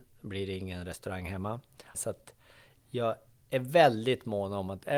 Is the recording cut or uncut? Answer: cut